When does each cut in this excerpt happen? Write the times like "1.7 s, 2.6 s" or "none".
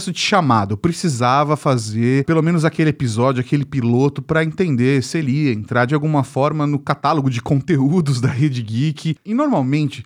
9.2 s